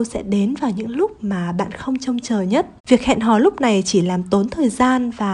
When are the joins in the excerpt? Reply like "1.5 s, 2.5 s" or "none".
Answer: 2.8 s